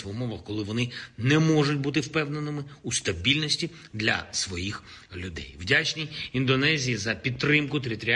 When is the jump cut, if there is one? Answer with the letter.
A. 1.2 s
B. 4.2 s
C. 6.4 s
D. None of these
D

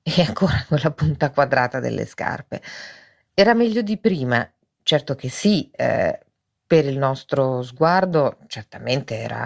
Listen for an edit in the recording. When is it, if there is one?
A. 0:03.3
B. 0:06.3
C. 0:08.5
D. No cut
D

